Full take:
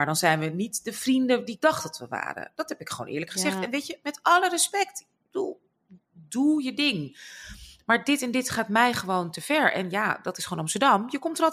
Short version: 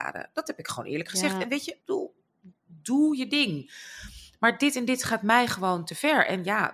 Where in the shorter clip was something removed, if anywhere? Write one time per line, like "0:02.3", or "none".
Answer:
0:01.8